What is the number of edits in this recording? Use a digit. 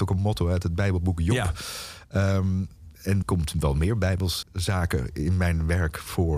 2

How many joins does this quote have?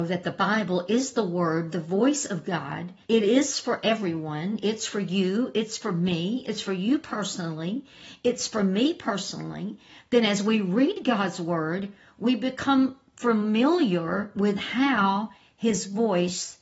1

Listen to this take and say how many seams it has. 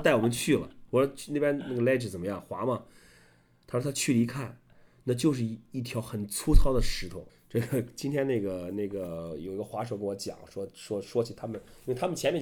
1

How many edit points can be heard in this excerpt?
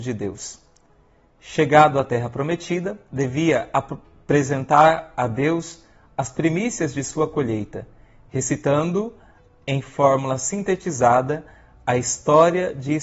1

